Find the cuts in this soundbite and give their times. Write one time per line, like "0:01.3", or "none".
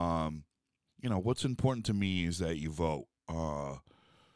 none